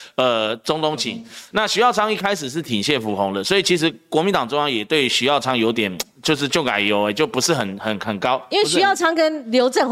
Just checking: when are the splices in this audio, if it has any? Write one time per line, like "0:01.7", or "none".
none